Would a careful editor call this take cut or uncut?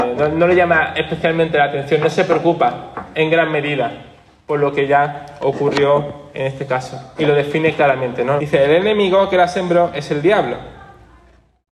cut